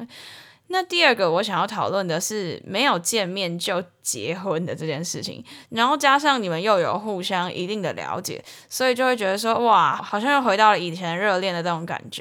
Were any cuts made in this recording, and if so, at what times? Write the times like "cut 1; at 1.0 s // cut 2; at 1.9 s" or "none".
cut 1; at 5.6 s // cut 2; at 10.0 s